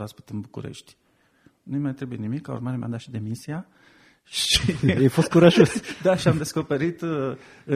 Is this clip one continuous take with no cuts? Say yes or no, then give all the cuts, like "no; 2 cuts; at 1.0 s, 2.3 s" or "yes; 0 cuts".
yes; 0 cuts